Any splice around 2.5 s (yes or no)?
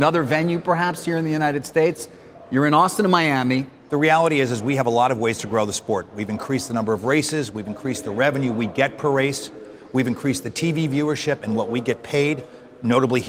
no